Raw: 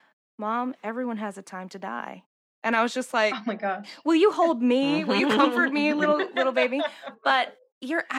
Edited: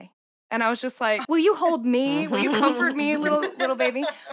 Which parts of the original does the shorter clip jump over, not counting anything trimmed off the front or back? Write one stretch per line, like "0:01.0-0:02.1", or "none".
0:03.4-0:04.0

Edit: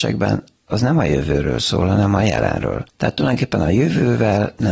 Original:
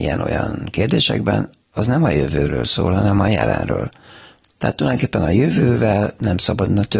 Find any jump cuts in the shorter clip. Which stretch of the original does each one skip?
0:04.0-0:04.5

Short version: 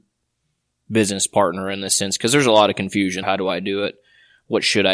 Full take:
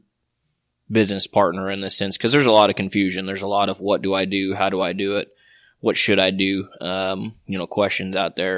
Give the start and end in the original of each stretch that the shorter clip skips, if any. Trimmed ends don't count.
0:03.2-0:04.6

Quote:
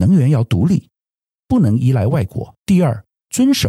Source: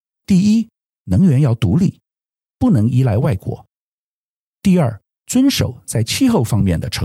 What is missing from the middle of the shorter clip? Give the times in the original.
0:03.7-0:04.5

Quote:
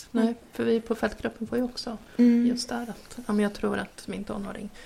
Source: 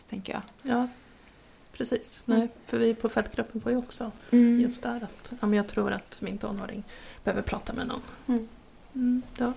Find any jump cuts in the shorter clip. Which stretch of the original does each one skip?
none

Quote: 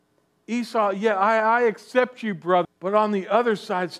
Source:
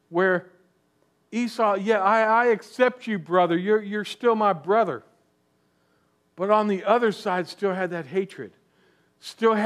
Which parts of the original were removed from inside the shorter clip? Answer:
0:03.5-0:06.2

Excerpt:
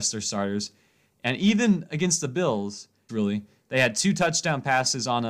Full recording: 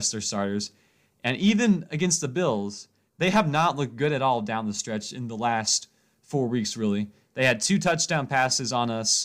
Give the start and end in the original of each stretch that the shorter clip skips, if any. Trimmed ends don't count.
0:03.1-0:06.7

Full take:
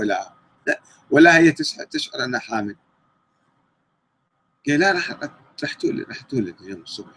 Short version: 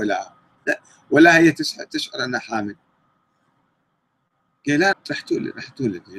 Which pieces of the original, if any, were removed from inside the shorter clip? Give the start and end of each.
0:04.9-0:05.5

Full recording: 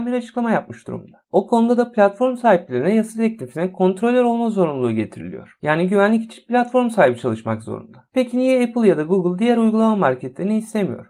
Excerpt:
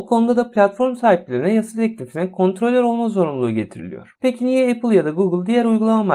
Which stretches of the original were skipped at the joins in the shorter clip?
0:05.6-0:08.1

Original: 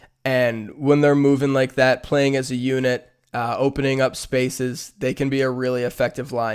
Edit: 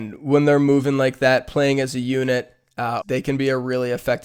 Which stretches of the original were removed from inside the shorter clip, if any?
0:03.6-0:04.9

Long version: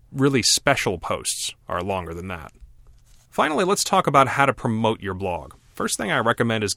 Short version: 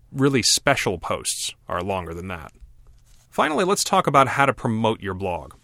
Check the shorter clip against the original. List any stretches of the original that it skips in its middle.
none

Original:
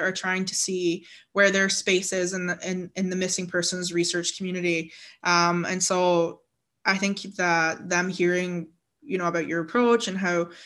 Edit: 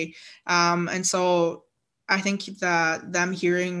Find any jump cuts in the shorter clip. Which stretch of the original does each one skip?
none

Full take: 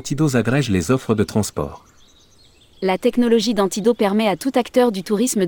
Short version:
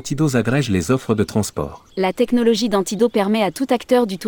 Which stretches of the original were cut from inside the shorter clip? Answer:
0:01.9-0:02.7

